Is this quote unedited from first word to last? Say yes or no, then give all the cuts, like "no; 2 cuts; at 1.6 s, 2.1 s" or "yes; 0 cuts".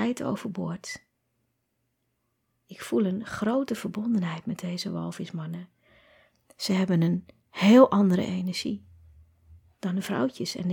yes; 0 cuts